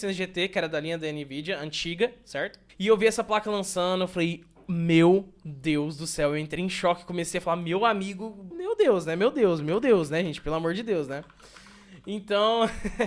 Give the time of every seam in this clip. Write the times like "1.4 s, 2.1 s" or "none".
2.7 s, 8.5 s